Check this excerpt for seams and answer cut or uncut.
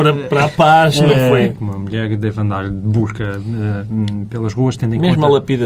cut